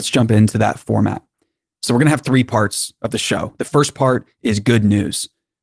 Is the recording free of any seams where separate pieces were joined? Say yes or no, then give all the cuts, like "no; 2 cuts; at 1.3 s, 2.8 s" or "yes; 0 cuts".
yes; 0 cuts